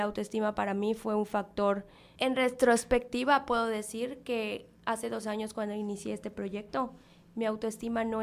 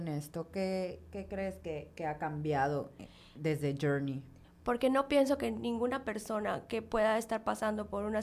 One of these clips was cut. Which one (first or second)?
second